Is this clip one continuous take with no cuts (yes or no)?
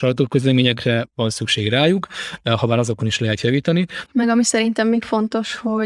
no